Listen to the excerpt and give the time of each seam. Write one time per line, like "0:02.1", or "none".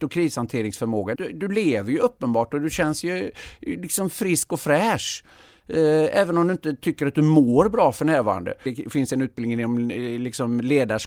0:01.1
0:08.7

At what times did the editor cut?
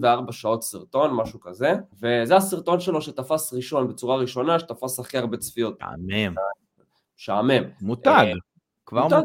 0:01.9
0:05.8
0:07.8

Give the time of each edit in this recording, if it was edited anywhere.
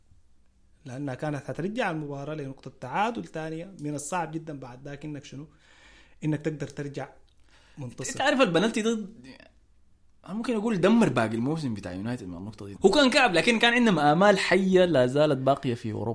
0:12.8

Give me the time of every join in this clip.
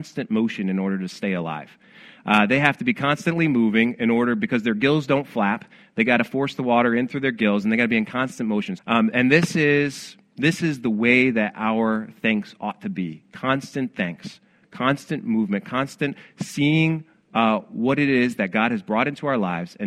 0:08.8

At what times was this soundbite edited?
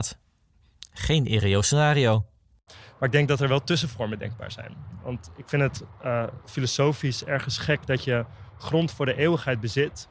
0:02.7

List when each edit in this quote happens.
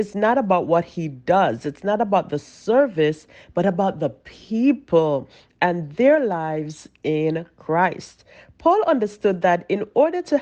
none

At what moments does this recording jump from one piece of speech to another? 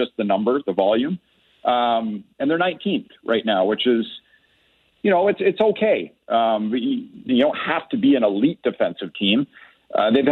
0:07.3

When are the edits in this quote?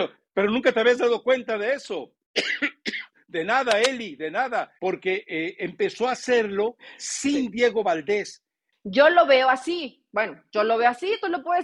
0:04.8
0:08.7

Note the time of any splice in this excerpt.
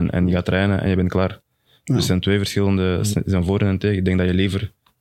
none

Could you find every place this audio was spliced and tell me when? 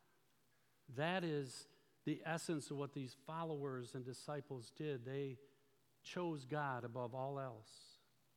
none

